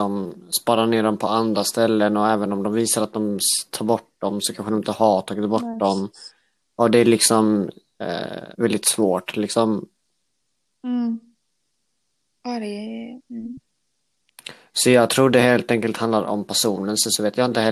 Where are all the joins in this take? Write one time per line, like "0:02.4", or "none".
0:08.5